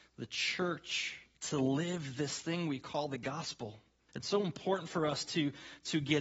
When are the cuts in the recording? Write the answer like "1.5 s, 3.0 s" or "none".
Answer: 1.4 s, 4.1 s